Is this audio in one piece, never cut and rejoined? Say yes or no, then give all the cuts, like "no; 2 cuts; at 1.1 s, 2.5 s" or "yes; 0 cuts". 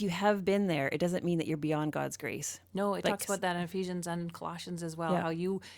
yes; 0 cuts